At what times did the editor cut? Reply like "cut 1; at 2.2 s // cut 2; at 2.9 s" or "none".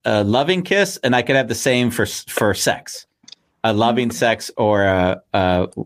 none